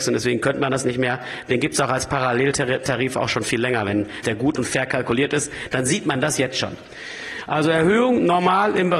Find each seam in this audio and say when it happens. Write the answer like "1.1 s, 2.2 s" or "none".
4.2 s